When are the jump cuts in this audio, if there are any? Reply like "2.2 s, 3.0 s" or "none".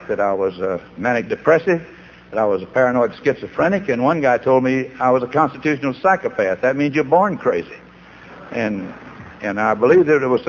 none

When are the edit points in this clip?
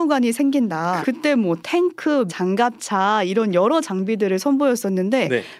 1.0 s, 2.3 s

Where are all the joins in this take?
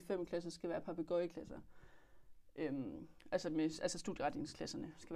none

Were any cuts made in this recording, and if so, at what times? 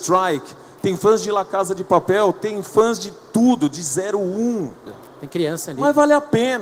4.9 s

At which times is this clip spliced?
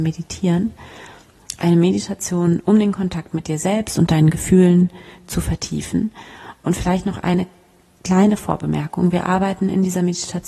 none

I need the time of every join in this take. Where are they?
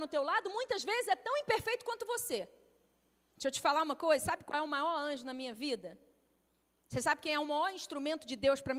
3.3 s

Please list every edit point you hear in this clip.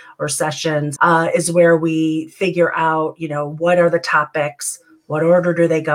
1.0 s

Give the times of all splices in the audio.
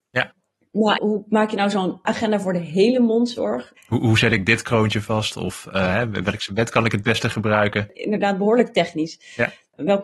1.0 s, 3.8 s

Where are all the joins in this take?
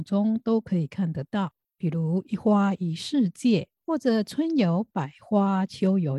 3.8 s

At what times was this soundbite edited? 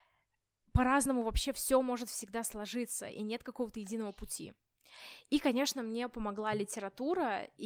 none

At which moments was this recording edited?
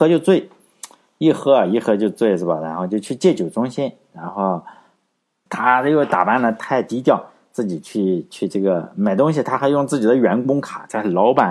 5.5 s

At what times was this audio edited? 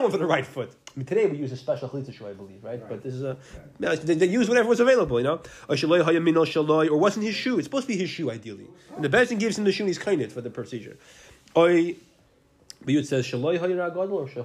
none

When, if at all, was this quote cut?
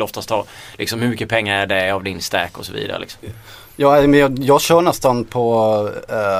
none

